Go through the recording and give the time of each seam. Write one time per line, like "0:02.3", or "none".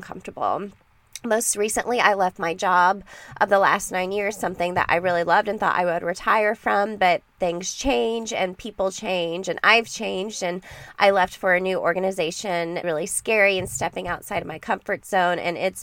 0:12.8